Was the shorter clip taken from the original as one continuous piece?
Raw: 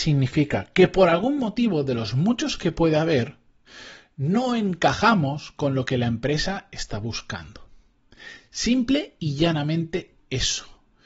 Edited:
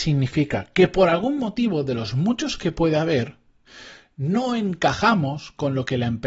yes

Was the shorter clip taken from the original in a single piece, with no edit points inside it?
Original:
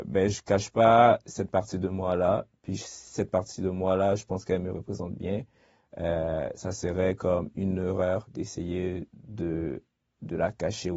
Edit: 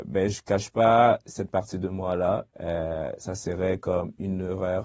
no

